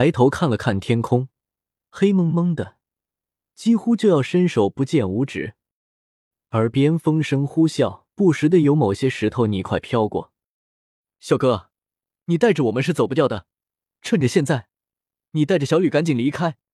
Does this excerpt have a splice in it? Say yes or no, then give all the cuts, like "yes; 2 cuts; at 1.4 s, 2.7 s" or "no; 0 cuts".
yes; 1 cut; at 8.1 s